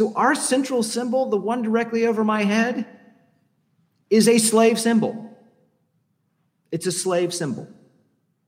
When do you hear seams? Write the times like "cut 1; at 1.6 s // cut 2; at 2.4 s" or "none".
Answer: none